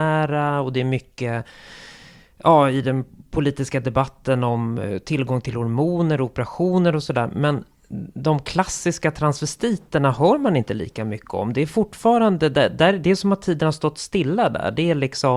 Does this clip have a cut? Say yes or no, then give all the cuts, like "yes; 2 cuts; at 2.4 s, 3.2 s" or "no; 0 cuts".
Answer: no; 0 cuts